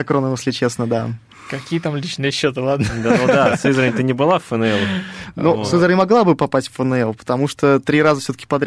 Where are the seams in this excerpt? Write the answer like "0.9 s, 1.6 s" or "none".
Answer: none